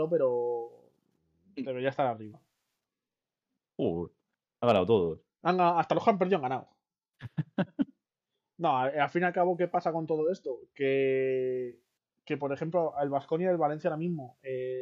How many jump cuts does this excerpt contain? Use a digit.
1